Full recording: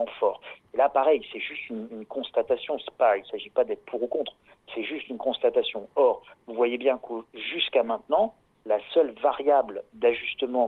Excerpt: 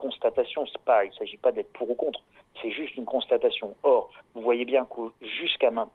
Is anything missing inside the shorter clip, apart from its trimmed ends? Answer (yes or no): no